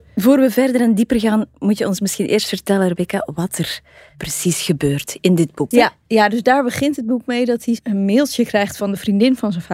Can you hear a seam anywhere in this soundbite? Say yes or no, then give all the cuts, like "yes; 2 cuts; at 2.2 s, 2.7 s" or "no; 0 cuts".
yes; 1 cut; at 5.7 s